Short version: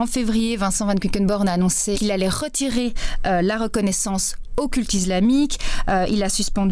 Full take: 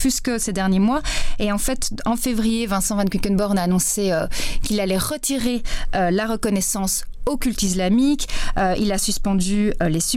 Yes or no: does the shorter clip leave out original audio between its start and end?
yes